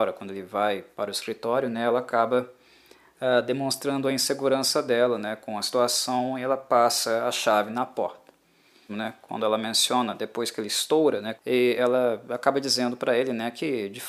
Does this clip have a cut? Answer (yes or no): yes